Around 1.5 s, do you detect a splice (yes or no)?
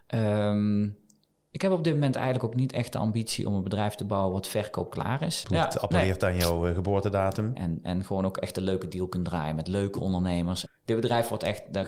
no